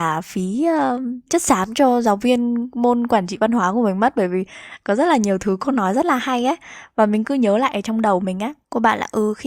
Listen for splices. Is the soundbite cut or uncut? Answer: cut